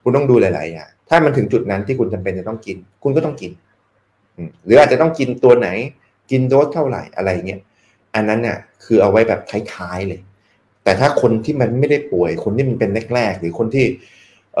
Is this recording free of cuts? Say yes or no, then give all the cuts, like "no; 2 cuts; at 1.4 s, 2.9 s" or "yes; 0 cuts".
no; 1 cut; at 1.0 s